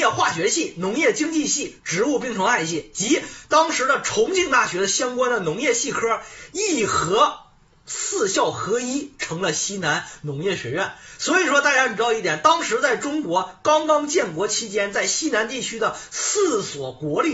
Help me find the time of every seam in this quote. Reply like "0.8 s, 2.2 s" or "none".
none

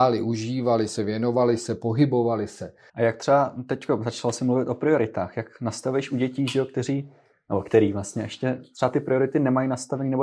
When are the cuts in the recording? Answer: 2.9 s

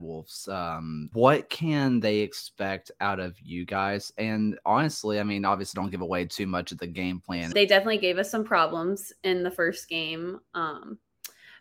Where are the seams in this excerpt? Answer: 1.1 s, 7.5 s

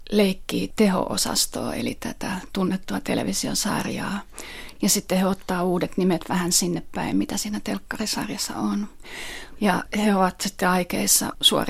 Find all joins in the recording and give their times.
4.8 s, 9.5 s

